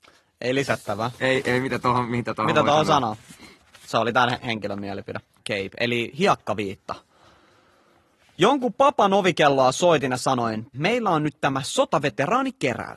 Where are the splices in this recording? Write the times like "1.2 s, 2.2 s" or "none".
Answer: 5.4 s, 10.7 s